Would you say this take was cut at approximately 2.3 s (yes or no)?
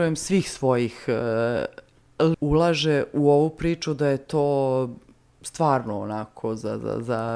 yes